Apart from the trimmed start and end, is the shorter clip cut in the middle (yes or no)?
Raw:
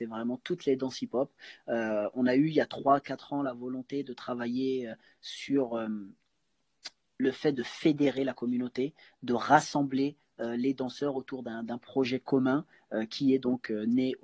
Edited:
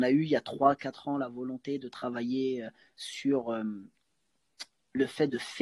no